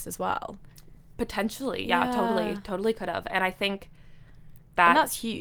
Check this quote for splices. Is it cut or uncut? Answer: uncut